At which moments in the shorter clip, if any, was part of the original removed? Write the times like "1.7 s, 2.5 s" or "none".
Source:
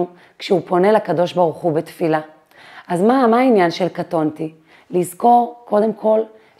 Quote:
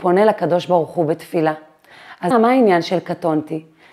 2.3 s